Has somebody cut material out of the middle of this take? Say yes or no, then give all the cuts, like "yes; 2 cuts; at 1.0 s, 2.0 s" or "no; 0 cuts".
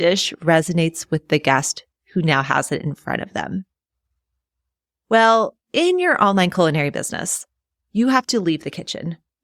no; 0 cuts